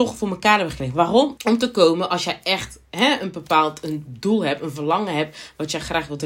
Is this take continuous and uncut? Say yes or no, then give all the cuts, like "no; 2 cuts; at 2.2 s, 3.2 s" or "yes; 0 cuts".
no; 1 cut; at 1.4 s